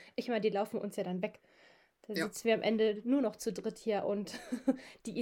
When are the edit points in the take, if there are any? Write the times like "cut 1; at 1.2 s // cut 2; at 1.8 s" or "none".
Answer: none